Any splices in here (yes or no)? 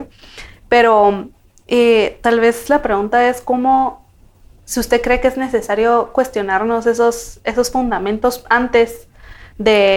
no